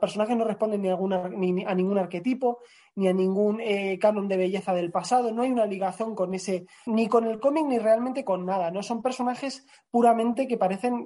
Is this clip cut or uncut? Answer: cut